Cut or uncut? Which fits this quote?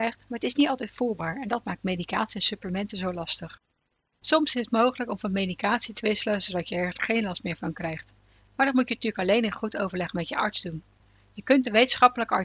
uncut